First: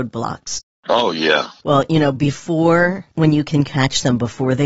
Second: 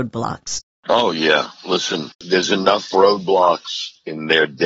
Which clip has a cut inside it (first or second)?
first